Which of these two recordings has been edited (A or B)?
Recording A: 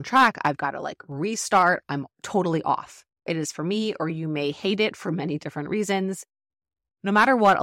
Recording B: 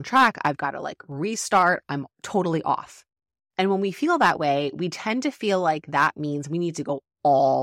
A